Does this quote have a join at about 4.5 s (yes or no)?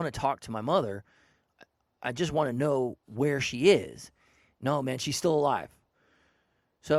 yes